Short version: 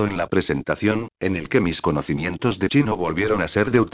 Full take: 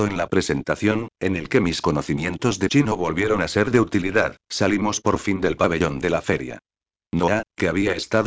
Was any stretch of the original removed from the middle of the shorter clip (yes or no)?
no